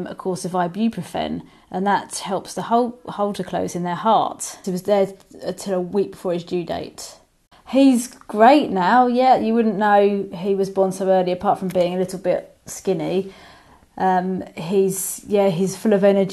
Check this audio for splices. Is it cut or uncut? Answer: cut